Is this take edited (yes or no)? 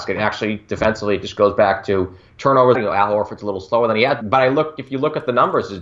yes